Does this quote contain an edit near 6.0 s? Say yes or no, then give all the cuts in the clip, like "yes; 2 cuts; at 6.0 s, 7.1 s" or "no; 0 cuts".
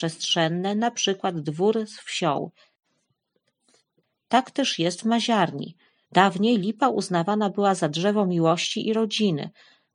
yes; 1 cut; at 6.0 s